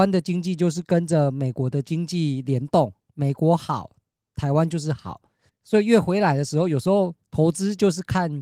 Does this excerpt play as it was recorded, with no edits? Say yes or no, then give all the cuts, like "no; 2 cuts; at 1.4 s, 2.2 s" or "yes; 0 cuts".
no; 1 cut; at 5.5 s